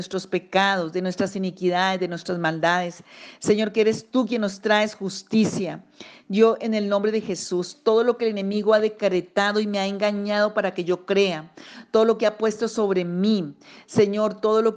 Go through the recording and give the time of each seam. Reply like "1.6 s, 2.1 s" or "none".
none